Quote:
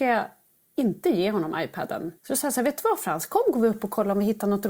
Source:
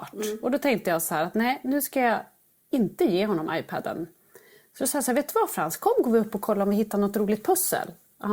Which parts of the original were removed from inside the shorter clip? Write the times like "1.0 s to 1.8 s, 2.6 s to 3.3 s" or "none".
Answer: 4.1 s to 4.7 s